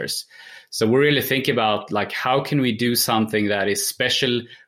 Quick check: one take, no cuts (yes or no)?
yes